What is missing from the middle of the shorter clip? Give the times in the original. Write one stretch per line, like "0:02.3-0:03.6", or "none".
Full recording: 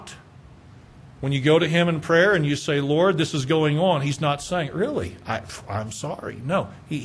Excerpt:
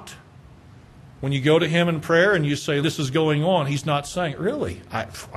0:02.8-0:03.2